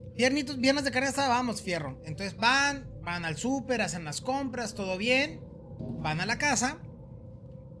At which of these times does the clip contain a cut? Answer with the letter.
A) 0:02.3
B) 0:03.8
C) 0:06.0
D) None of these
D